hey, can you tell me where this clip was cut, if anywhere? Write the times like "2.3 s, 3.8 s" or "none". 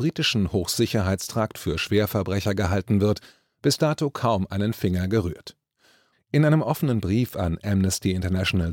6.1 s